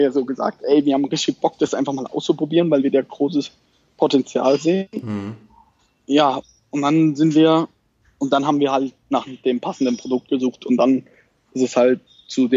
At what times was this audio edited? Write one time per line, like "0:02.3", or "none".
none